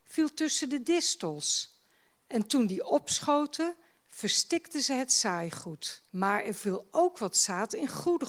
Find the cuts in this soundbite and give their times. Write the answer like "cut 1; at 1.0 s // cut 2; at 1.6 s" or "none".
cut 1; at 6.1 s